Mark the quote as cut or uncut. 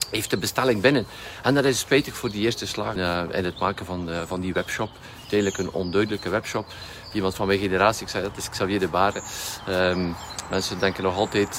cut